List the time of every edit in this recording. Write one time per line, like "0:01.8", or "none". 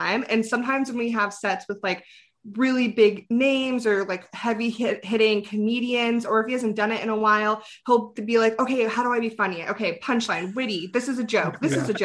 none